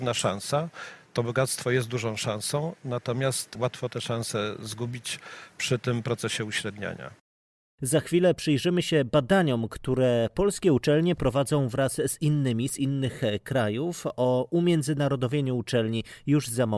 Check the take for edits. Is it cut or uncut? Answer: uncut